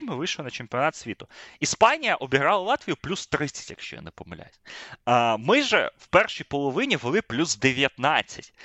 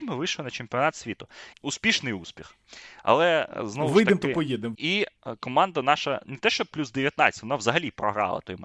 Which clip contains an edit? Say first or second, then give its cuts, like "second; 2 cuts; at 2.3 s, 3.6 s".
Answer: second; 2 cuts; at 1.5 s, 4.7 s